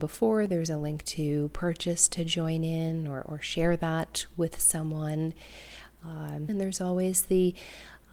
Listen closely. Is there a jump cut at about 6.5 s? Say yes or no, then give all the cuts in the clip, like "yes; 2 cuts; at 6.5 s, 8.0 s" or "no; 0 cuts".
yes; 1 cut; at 6.5 s